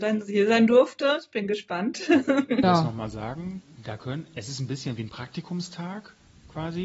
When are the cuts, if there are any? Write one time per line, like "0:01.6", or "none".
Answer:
0:02.6